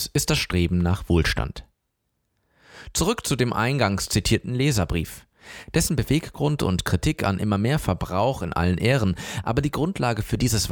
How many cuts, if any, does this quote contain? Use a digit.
0